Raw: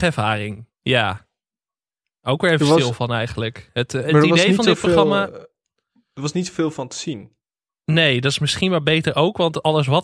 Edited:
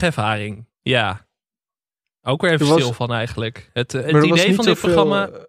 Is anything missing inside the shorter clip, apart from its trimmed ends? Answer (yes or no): no